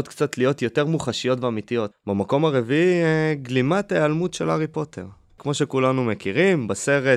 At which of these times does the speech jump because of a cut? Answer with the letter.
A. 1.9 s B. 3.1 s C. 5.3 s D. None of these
A